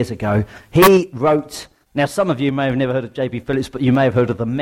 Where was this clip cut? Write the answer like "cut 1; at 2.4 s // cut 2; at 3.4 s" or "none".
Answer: cut 1; at 1.8 s